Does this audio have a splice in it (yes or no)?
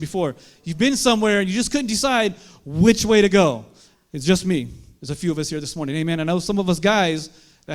yes